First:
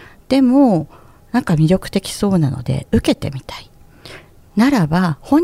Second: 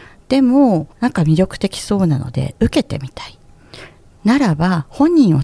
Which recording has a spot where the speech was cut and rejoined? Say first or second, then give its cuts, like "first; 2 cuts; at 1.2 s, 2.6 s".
second; 1 cut; at 0.9 s